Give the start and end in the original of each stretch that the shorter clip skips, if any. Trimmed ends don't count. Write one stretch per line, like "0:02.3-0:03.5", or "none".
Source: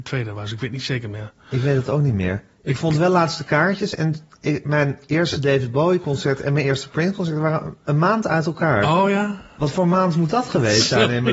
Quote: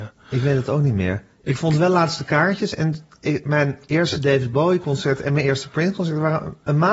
none